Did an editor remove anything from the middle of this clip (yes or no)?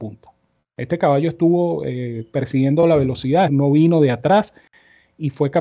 yes